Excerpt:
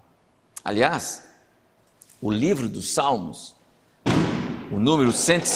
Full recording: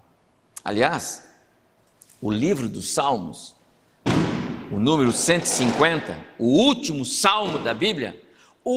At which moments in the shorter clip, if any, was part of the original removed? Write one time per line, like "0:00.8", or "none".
none

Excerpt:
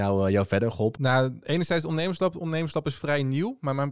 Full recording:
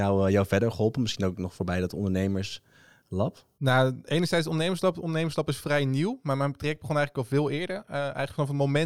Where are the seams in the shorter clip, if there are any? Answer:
0:00.9

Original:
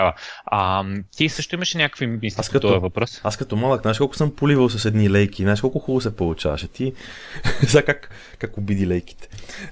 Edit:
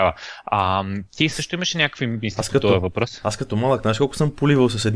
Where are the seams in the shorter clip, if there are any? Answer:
none

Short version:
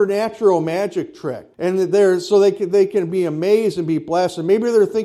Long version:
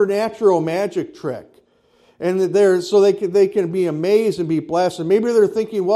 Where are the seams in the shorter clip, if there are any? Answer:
0:01.5

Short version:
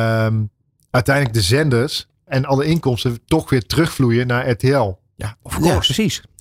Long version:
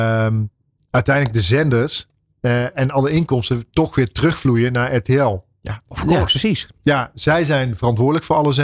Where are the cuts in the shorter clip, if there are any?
0:02.3

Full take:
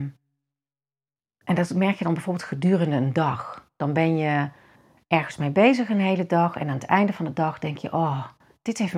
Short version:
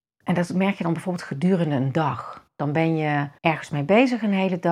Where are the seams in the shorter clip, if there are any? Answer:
0:03.4

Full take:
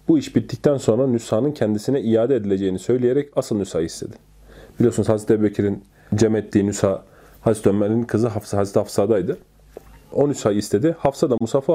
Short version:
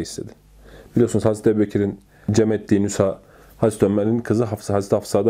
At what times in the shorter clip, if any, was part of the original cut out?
none

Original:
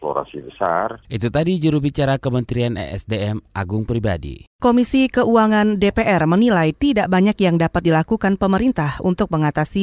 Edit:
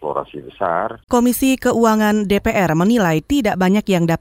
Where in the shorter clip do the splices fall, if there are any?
0:01.0

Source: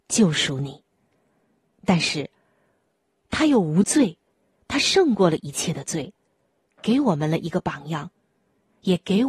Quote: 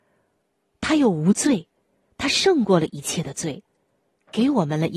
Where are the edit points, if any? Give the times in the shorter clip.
none

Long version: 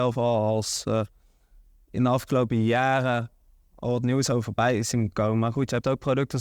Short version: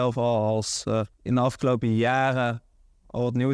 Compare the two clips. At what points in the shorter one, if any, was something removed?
0:01.1

